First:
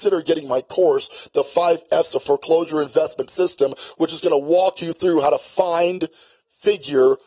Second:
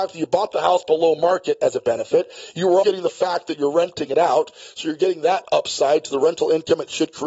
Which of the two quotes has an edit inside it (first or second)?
second